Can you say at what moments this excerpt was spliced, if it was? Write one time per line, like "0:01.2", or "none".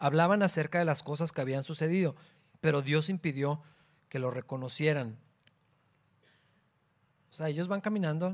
0:02.5